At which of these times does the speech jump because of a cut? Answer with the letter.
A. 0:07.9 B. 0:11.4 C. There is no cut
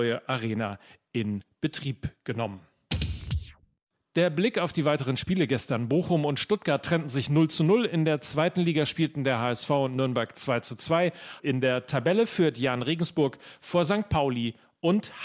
B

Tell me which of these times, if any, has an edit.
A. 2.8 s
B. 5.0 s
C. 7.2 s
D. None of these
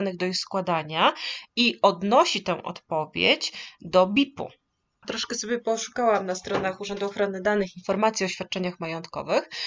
B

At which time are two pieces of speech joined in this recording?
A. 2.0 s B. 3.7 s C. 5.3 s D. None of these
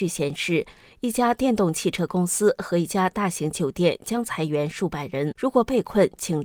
C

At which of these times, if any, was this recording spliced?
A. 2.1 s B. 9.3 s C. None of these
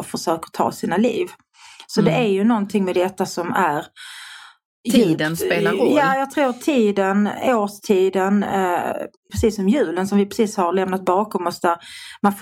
B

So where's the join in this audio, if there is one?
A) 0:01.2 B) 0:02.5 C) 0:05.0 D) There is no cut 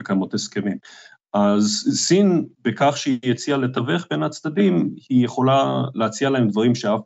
B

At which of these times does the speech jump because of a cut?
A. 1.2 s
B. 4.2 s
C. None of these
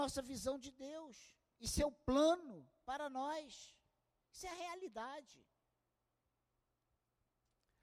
B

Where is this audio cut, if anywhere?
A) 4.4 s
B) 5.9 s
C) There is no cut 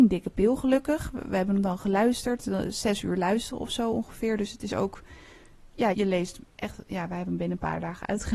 B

